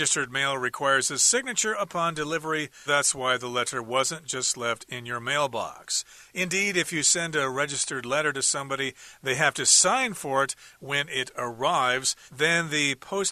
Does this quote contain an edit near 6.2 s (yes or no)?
no